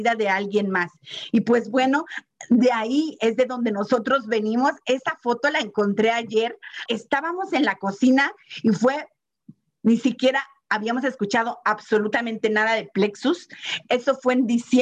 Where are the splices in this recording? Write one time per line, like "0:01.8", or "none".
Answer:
0:06.9
0:09.8